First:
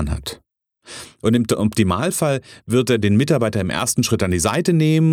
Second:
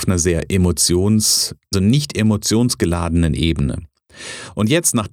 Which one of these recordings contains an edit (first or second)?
second